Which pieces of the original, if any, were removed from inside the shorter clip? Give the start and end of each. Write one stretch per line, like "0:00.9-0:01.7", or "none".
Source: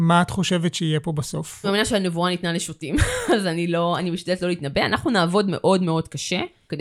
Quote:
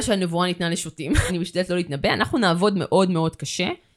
0:03.1-0:04.0